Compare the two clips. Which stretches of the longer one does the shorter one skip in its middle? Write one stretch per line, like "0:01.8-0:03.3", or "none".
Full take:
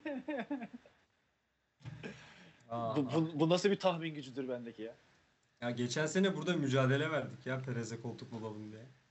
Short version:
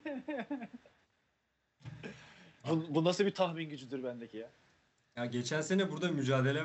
0:02.6-0:03.1